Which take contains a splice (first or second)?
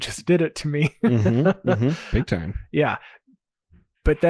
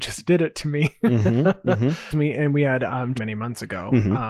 second